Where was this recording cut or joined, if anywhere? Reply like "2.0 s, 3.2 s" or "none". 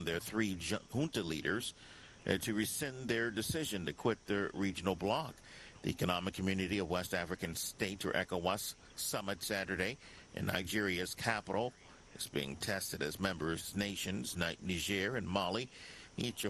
none